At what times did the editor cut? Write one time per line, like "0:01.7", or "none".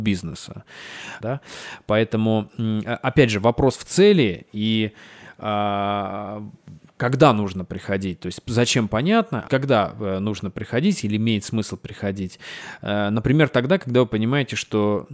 0:01.2
0:09.5

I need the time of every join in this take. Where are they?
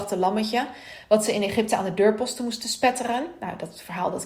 none

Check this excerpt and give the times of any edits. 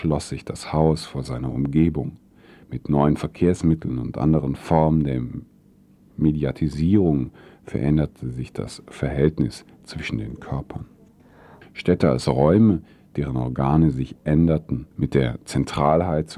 0:11.6
0:14.9

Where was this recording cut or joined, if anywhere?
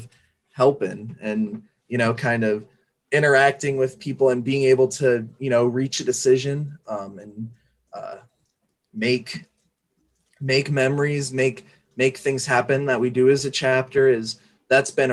none

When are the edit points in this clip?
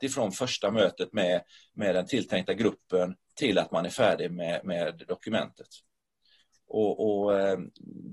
none

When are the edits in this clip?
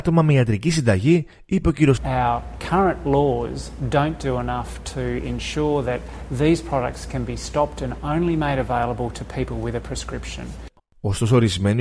0:02.0
0:10.8

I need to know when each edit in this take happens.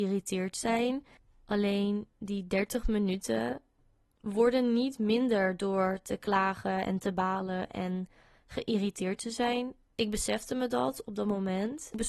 0:09.8

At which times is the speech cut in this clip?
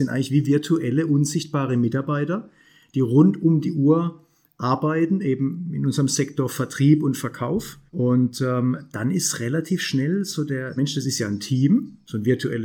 0:07.9
0:10.8

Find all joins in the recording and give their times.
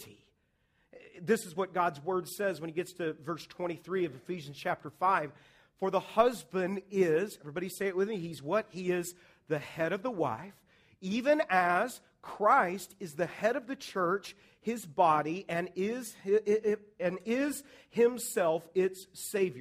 none

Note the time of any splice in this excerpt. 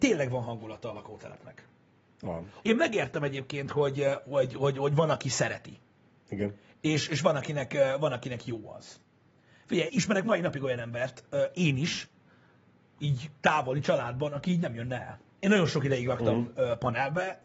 0:02.6
0:09.9
0:15.4

